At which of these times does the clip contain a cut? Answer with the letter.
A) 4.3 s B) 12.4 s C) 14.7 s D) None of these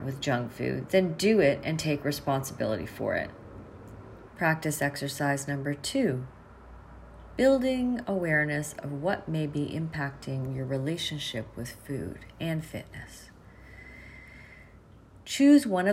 A